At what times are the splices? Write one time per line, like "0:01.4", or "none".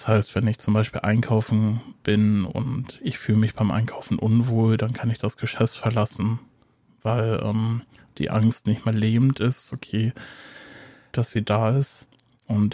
0:09.7
0:11.1